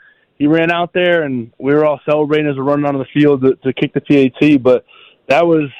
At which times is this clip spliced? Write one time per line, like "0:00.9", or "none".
none